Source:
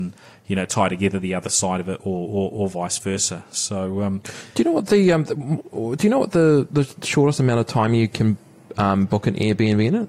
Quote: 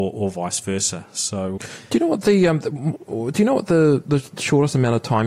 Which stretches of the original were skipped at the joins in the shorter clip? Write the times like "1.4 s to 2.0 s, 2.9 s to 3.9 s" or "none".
3.9 s to 4.2 s

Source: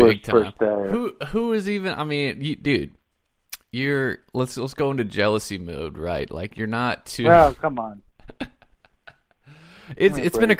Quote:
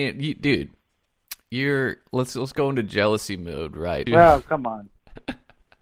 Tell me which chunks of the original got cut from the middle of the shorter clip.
6.3 s to 7.2 s

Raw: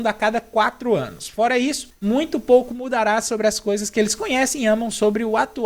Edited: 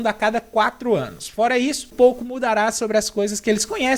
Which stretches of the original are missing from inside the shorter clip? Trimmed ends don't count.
1.9 s to 2.4 s

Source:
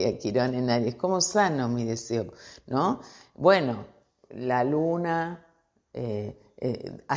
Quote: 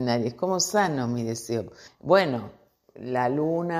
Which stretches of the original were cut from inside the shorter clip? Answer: 2.5 s to 3.2 s

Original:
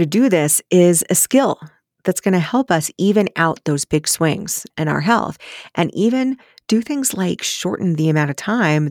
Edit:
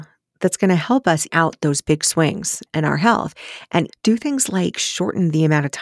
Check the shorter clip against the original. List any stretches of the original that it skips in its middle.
2.9 s to 3.3 s, 5.9 s to 6.5 s

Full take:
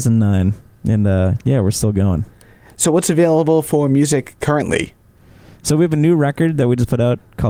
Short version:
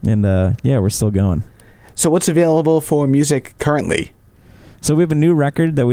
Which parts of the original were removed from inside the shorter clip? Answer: none

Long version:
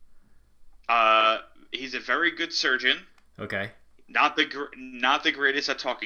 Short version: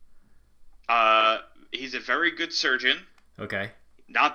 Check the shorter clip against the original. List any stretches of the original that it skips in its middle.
none

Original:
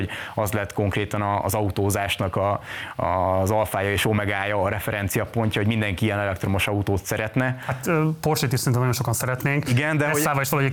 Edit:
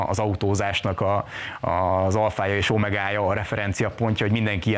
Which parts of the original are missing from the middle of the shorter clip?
none

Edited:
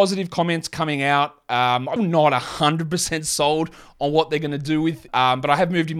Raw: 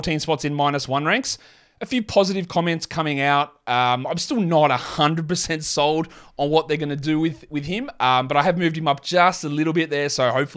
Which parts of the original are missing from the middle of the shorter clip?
4.1 s to 4.3 s, 7.5 s to 7.9 s

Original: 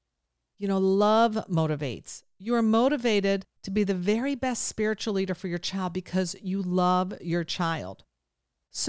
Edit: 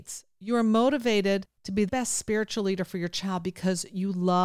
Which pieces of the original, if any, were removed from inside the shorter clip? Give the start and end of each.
3.9 s to 4.4 s

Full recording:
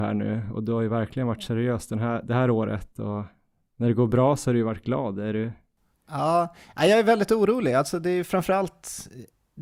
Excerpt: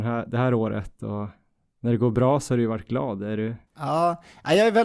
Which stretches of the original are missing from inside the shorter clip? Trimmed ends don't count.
5.6 s to 6.0 s

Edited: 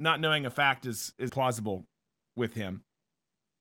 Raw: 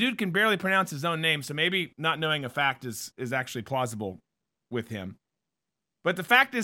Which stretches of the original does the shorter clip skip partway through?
3.3 s to 3.6 s

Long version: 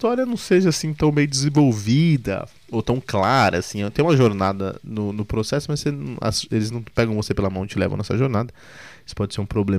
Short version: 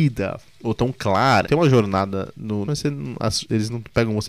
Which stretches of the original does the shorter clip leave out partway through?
3.5 s to 3.9 s, 5.1 s to 5.7 s

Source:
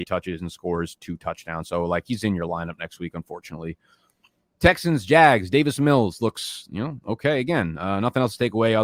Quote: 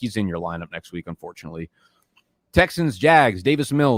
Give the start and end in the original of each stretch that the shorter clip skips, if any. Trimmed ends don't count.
none

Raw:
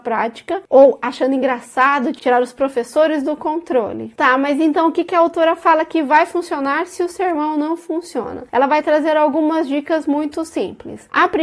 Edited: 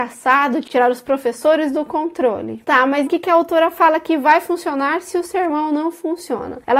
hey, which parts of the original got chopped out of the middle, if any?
4.6 s to 4.9 s

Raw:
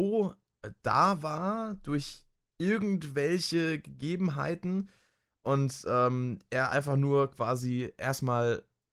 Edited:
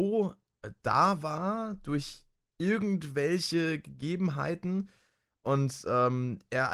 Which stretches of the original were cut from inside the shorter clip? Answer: none

